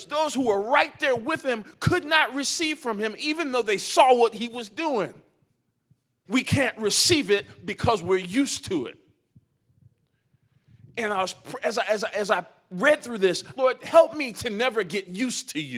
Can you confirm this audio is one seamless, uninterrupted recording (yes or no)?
no